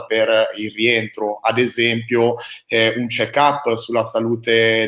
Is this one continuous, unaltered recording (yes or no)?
yes